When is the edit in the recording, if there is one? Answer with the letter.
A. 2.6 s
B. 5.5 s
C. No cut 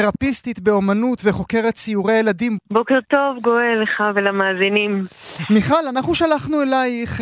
A